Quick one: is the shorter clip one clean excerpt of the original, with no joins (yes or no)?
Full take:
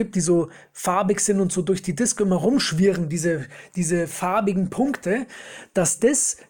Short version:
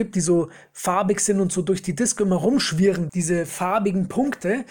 no